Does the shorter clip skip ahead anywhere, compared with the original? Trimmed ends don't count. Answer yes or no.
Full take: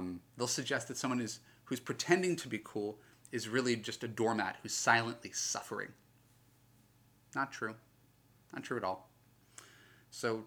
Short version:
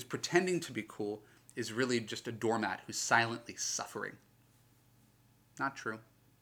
no